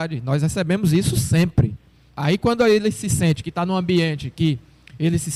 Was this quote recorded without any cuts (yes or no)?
no